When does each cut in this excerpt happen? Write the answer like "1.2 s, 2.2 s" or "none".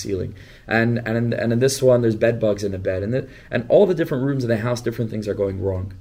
none